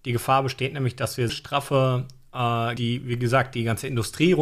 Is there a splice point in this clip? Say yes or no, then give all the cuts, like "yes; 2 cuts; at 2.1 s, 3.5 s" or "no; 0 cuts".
yes; 2 cuts; at 1.3 s, 2.8 s